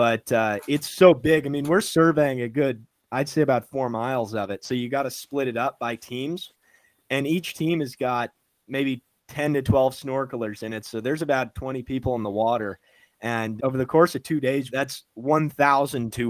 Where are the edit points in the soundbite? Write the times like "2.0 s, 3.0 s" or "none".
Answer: 13.6 s, 14.7 s